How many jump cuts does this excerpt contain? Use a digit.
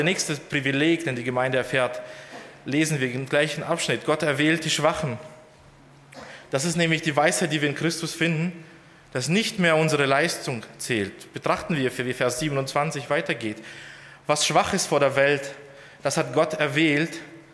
0